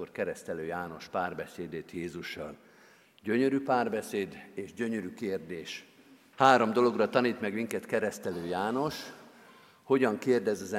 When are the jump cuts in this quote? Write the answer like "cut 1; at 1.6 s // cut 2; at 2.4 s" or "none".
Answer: cut 1; at 6.3 s